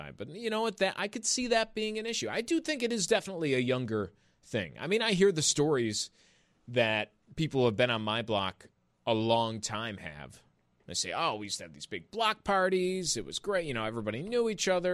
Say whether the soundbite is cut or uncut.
uncut